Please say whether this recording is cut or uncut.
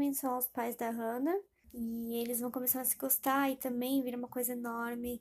cut